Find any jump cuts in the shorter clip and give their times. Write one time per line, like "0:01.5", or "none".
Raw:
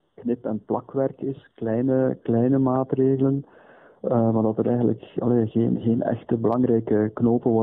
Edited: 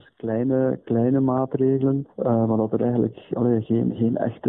0:02.1